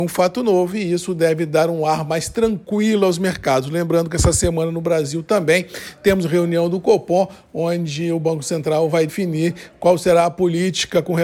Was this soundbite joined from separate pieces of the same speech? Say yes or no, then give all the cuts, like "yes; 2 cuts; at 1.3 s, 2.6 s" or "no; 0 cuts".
yes; 1 cut; at 9.1 s